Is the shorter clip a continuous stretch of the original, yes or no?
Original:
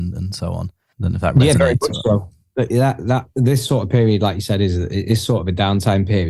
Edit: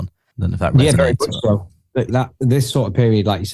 no